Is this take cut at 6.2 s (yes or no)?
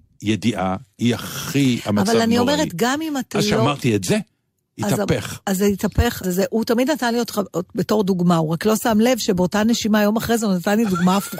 yes